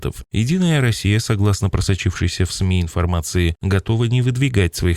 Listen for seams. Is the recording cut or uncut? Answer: uncut